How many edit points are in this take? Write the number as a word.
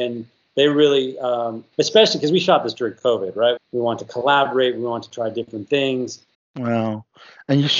three